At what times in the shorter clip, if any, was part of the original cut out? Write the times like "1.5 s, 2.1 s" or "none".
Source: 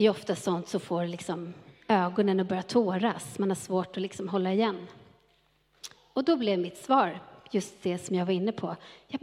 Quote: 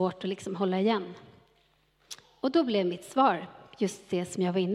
none